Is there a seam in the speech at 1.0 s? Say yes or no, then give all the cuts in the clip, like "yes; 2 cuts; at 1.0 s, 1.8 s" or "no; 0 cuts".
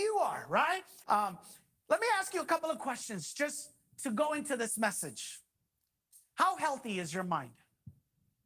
yes; 1 cut; at 1.0 s